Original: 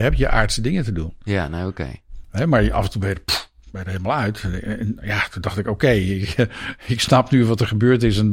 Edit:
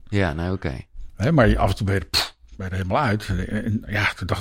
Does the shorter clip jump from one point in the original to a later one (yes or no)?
no